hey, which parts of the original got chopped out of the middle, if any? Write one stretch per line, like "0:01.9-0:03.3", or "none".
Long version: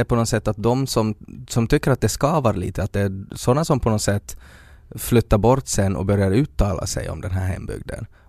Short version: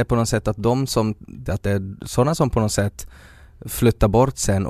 0:01.5-0:02.8